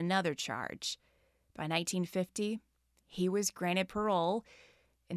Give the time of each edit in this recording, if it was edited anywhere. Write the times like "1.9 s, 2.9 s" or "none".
none